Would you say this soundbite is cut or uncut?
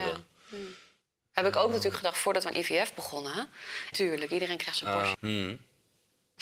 cut